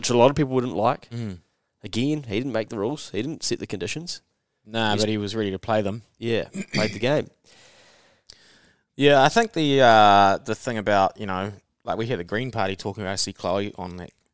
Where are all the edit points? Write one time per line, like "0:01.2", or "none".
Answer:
none